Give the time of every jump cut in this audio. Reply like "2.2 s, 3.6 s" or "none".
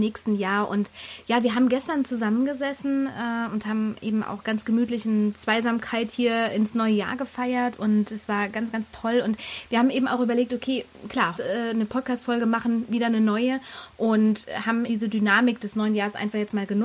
11.3 s, 14.9 s